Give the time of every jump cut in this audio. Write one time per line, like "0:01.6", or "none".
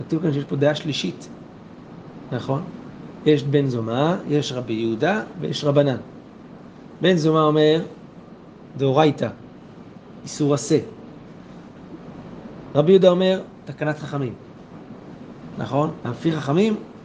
0:16.0